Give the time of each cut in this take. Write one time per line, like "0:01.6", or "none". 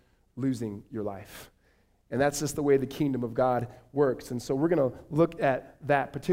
none

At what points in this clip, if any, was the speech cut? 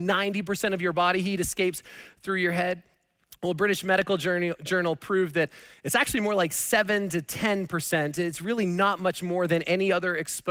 none

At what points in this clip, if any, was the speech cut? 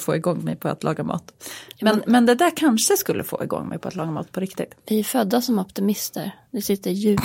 none

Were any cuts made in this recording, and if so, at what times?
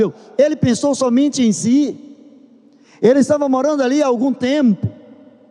none

